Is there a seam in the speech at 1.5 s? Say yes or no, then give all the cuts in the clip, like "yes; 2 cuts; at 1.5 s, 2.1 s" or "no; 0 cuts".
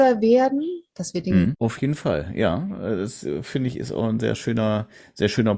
yes; 1 cut; at 1.5 s